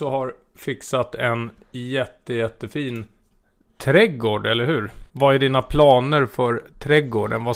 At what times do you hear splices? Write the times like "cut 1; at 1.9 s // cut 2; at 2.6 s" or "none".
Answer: cut 1; at 5.1 s